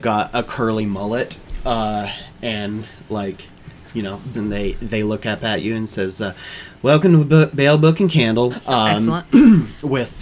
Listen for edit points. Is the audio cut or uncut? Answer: cut